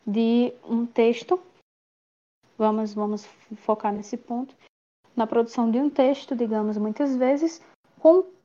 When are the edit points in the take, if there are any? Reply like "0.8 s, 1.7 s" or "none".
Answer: none